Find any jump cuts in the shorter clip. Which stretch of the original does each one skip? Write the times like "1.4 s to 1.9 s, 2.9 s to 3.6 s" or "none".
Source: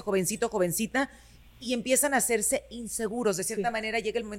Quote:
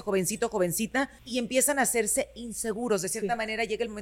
1.2 s to 1.5 s